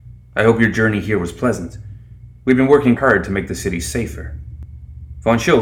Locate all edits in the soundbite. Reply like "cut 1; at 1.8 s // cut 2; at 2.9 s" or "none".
cut 1; at 3.0 s